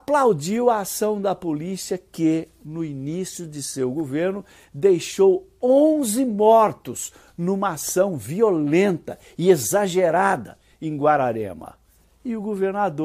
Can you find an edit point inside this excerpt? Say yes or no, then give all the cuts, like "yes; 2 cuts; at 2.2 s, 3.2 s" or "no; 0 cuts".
no; 0 cuts